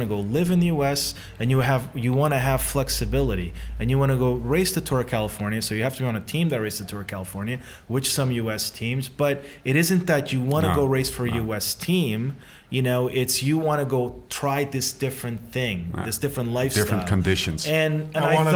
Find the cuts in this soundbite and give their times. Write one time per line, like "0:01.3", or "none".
none